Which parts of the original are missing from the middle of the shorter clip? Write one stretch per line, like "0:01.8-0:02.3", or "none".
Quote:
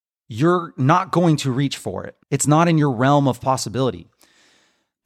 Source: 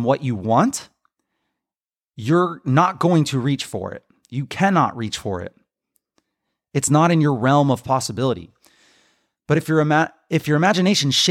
0:04.1-0:06.7